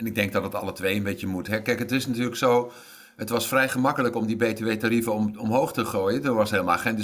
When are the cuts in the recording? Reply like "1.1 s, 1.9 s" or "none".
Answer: none